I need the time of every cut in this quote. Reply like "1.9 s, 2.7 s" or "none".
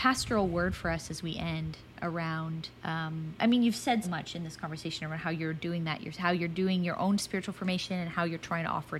2.8 s, 4.0 s